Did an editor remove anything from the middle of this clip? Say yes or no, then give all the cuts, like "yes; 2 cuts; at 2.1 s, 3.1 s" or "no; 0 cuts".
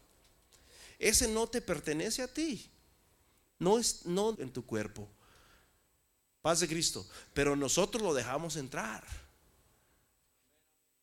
yes; 1 cut; at 4.3 s